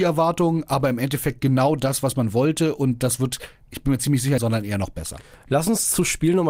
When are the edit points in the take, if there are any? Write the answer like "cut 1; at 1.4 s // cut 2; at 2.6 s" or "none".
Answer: cut 1; at 4.4 s